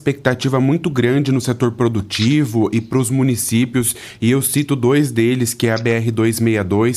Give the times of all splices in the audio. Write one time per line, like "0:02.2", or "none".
none